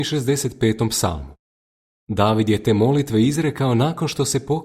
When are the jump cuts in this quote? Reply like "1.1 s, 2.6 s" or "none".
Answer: none